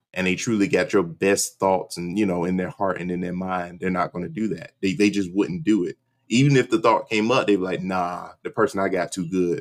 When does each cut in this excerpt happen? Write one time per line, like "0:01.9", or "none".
none